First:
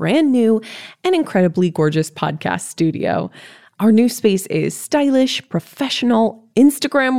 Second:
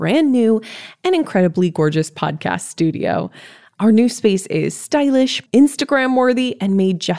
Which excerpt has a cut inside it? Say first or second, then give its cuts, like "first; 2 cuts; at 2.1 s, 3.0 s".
second; 1 cut; at 5.5 s